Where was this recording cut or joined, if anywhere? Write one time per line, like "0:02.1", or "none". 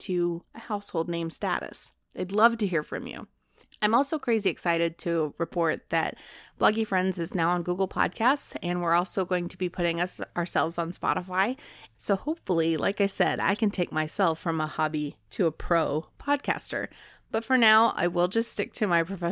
0:11.9